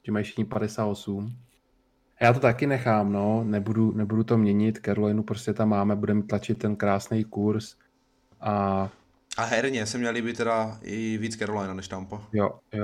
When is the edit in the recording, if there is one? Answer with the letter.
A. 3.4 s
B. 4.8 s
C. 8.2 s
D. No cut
D